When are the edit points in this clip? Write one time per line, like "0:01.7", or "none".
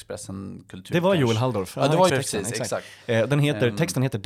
0:02.1